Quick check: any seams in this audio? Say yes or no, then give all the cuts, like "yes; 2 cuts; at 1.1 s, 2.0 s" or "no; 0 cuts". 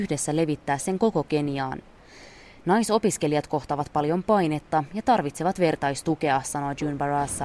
no; 0 cuts